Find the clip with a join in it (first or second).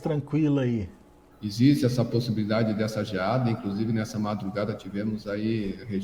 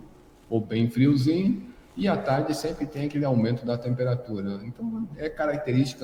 first